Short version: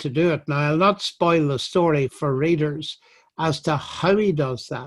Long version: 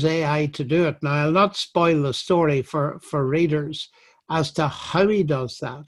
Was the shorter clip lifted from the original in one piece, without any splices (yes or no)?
no